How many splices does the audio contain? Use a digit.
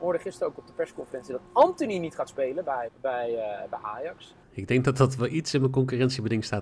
2